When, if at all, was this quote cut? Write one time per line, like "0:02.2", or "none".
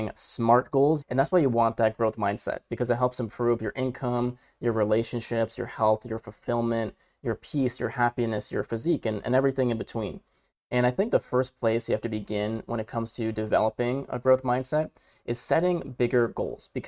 0:01.0

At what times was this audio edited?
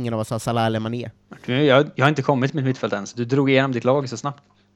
none

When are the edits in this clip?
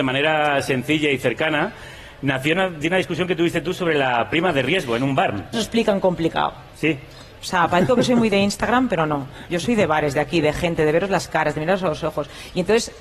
0:05.5
0:07.3

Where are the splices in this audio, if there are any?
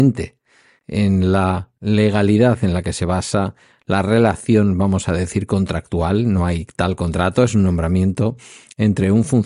none

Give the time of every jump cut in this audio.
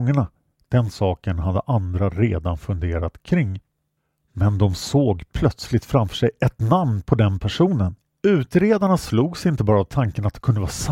0:08.2

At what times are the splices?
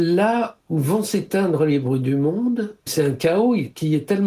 0:02.9

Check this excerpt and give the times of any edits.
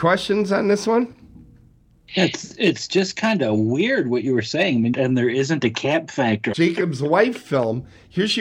0:04.9
0:06.5

